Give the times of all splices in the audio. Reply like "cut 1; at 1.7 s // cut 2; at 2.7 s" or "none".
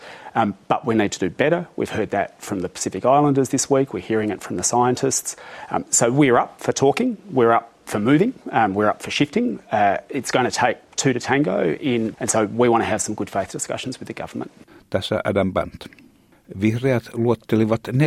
cut 1; at 12.1 s

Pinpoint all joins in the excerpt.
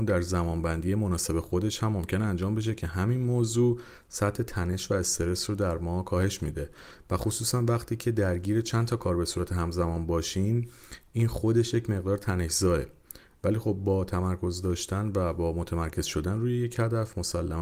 none

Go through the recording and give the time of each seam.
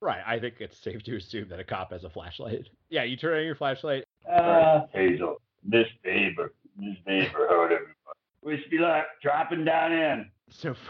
cut 1; at 4.2 s // cut 2; at 8.3 s

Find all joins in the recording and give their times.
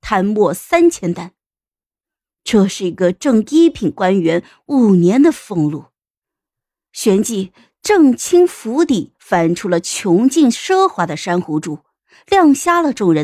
none

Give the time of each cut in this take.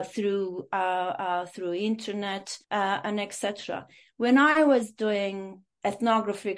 cut 1; at 2.6 s

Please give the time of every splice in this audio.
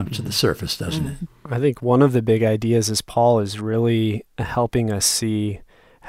cut 1; at 1.3 s

